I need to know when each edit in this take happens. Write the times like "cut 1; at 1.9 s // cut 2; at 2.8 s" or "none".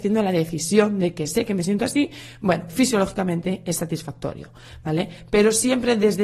cut 1; at 2.7 s

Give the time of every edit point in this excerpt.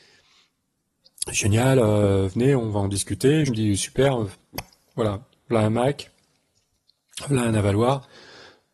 cut 1; at 3.5 s

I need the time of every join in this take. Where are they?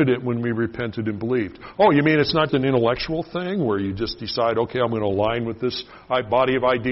cut 1; at 2.5 s

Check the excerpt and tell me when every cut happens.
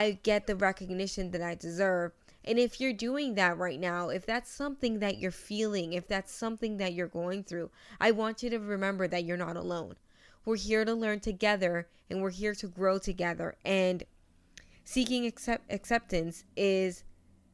none

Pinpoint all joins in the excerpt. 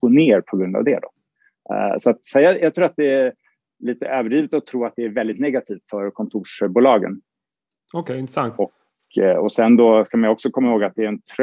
cut 1; at 8.6 s

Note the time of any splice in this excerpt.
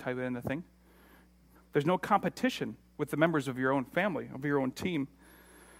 cut 1; at 1.6 s

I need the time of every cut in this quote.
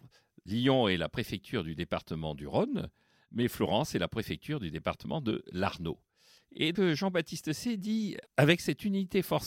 cut 1; at 6.7 s // cut 2; at 8.3 s

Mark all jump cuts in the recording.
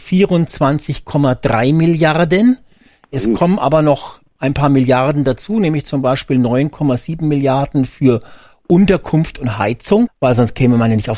cut 1; at 10.1 s

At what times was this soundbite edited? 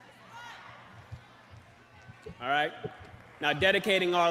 none

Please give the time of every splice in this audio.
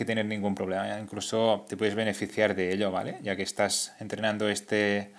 none

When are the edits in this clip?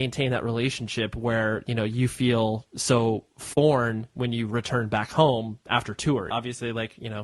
cut 1; at 6.3 s

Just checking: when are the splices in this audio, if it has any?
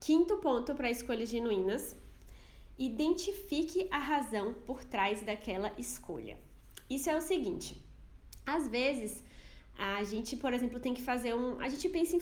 none

